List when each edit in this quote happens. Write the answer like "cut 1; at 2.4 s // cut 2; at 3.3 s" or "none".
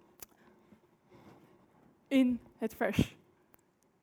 none